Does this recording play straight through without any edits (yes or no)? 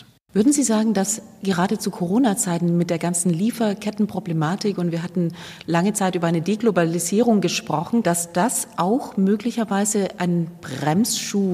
no